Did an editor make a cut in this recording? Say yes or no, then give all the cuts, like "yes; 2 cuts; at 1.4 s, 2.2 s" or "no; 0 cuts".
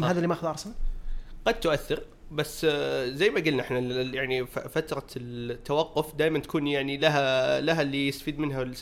no; 0 cuts